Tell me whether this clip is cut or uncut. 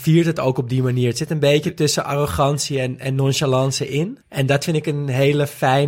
cut